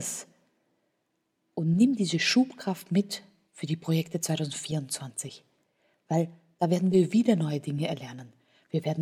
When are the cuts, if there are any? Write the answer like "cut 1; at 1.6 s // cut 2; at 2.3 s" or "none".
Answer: none